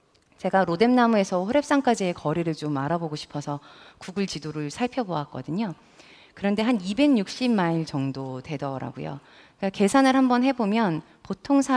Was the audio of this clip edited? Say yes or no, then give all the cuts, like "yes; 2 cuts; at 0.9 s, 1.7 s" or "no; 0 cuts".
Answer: no; 0 cuts